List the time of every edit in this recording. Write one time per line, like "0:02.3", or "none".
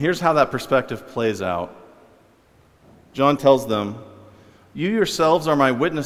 0:03.4